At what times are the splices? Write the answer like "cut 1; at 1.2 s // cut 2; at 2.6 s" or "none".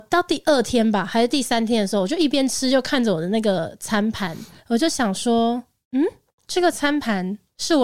none